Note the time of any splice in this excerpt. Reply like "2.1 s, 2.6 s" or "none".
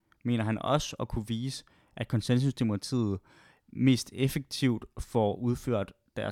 none